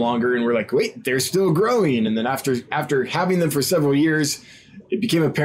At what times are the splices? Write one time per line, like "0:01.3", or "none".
none